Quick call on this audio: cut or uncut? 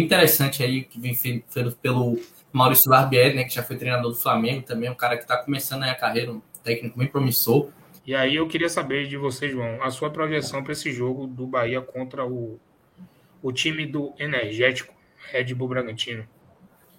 cut